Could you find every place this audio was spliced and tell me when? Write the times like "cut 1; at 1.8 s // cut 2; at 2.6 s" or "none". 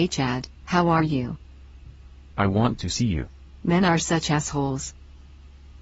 cut 1; at 2.3 s // cut 2; at 3.6 s